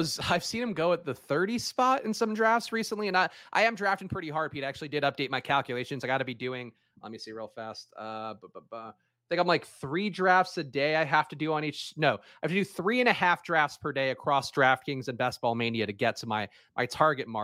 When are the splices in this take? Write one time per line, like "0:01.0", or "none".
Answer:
none